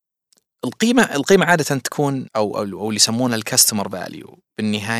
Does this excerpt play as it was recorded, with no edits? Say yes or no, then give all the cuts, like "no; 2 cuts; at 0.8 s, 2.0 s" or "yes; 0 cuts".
no; 1 cut; at 2.3 s